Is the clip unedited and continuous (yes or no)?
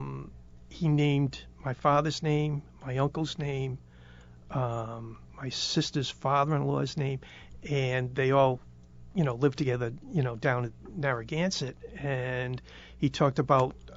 no